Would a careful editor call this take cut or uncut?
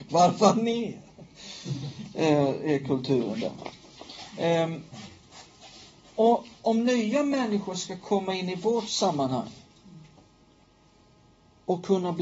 uncut